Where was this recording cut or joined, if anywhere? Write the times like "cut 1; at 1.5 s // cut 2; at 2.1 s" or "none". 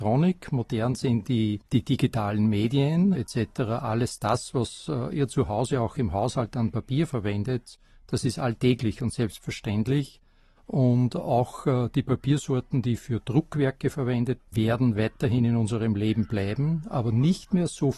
cut 1; at 1.7 s // cut 2; at 3.1 s // cut 3; at 14.4 s